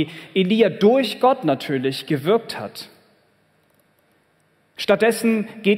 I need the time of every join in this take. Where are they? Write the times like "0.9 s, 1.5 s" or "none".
4.8 s